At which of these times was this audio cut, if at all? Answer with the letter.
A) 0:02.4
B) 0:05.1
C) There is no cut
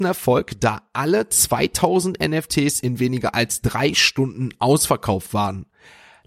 C